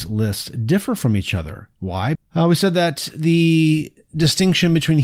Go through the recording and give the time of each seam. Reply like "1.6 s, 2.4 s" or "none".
2.1 s